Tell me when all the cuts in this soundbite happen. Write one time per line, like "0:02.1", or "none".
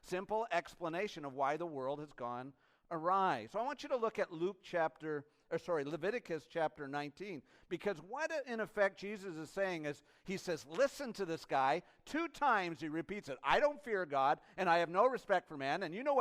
none